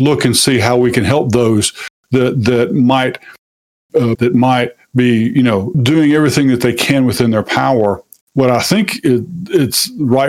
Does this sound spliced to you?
yes; 3 cuts; at 4.1 s, 5.7 s, 8.2 s

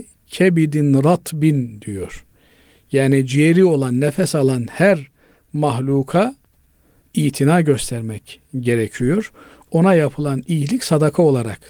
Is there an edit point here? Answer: no; 0 cuts

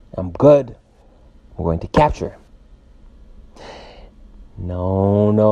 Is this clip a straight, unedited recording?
yes; 0 cuts

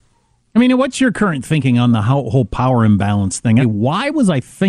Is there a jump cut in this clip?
yes; 1 cut; at 3.6 s

